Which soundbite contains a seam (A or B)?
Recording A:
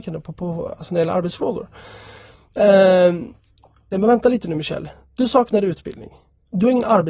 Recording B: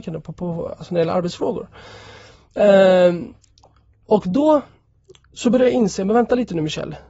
A